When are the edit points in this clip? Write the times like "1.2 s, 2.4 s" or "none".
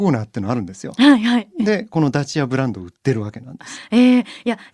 none